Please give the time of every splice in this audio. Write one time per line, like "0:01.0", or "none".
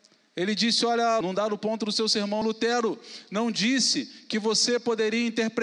0:01.2
0:02.4